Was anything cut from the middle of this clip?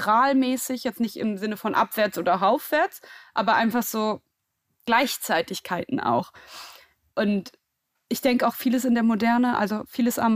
no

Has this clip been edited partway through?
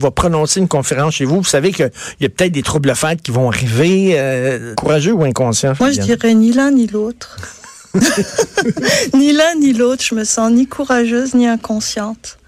yes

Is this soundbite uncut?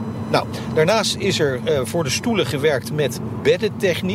yes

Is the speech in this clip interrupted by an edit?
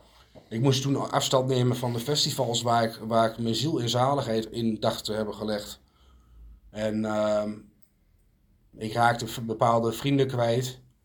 no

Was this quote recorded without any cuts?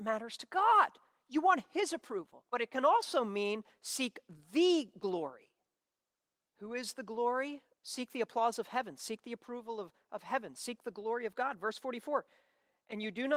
no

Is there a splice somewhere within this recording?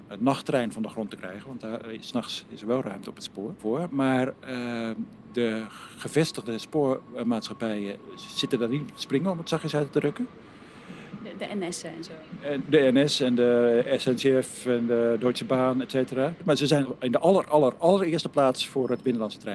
no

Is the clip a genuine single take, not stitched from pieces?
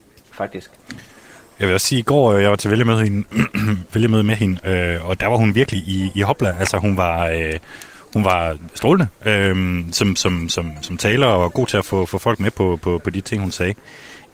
yes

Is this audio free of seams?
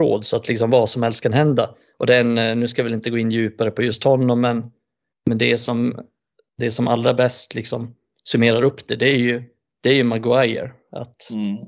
yes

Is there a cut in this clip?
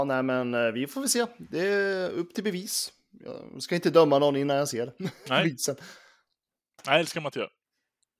no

